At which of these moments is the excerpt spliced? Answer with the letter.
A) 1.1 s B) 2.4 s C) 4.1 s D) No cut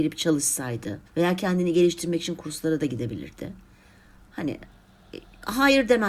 A